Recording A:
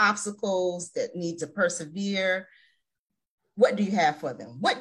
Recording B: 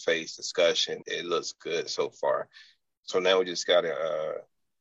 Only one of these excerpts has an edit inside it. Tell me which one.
B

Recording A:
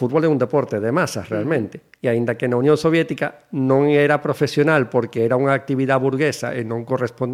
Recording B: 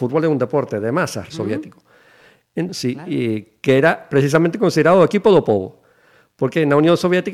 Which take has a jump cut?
B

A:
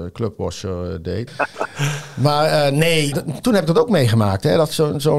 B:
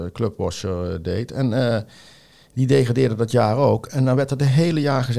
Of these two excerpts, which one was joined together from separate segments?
A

